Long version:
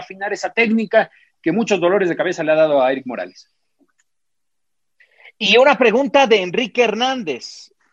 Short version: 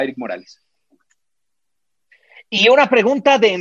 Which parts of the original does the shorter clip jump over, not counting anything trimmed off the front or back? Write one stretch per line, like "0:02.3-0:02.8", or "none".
none